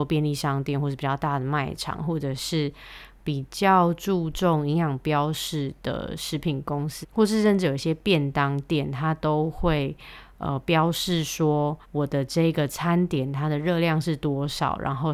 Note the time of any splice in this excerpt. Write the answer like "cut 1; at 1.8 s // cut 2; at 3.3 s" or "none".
cut 1; at 7.0 s // cut 2; at 11.8 s